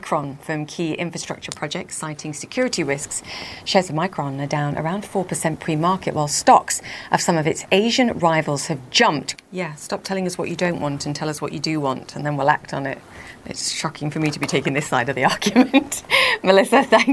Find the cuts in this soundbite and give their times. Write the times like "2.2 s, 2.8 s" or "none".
9.3 s